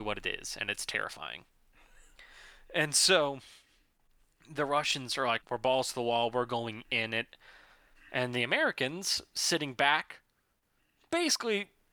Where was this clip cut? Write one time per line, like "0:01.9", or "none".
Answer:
0:05.4